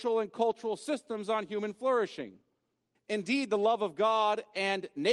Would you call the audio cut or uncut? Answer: cut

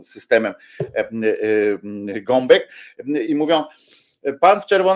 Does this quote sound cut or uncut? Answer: uncut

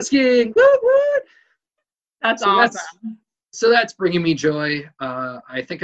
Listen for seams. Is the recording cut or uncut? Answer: uncut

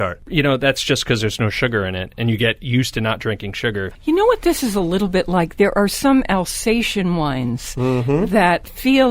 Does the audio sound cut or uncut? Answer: uncut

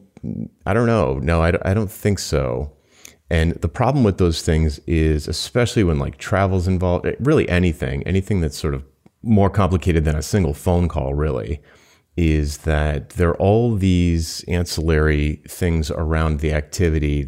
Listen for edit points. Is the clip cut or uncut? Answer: uncut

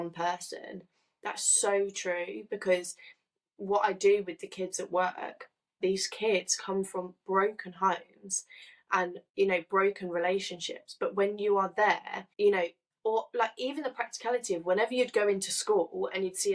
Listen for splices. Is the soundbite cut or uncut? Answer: cut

